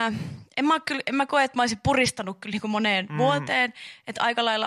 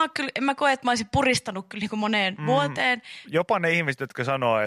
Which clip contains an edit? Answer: second; 1 cut; at 3.2 s

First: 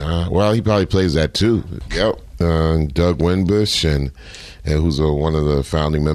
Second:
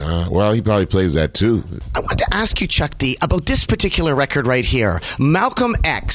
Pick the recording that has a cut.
first; 1 cut; at 1.9 s

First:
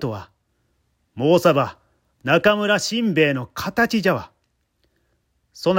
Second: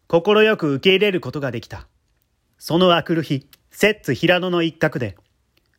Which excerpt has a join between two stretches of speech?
second; 2 cuts; at 2.4 s, 3.6 s

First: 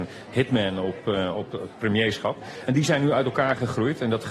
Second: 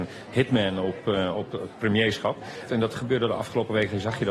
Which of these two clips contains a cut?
second; 1 cut; at 2.7 s

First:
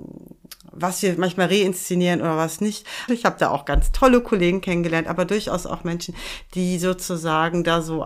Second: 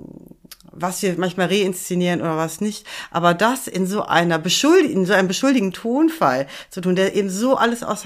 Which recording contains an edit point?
first; 1 cut; at 3.1 s

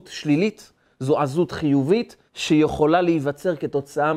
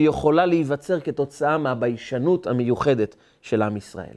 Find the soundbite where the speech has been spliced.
first; 1 cut; at 2.3 s

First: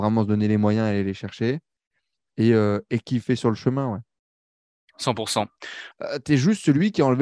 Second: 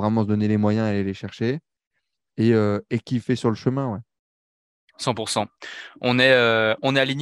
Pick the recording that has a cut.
first; 1 cut; at 5.9 s

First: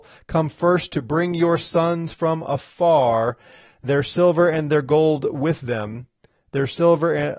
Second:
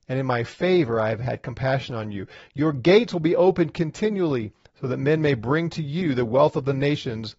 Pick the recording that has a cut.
second; 1 cut; at 4.7 s

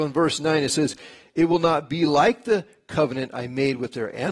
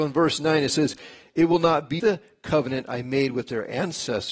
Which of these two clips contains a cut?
second; 1 cut; at 2.0 s

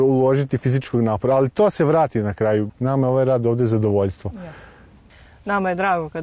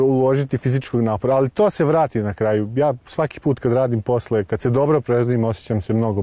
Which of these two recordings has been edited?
first; 1 cut; at 2.7 s

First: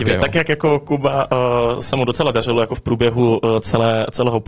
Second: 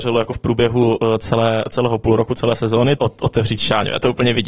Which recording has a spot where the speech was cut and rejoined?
second; 1 cut; at 3.0 s

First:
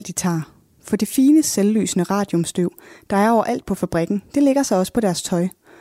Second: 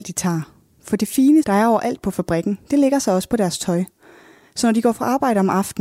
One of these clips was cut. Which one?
second; 1 cut; at 1.4 s

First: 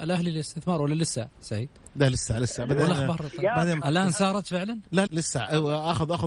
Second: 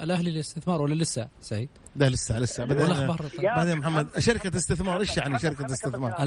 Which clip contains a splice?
first; 2 cuts; at 3.8 s, 5.1 s

